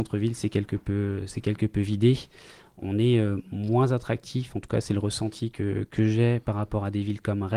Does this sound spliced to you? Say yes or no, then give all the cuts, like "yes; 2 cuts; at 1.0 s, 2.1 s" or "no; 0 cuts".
no; 0 cuts